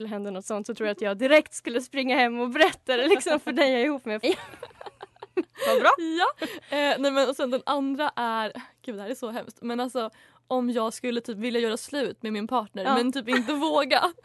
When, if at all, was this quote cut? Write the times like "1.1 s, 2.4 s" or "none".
4.2 s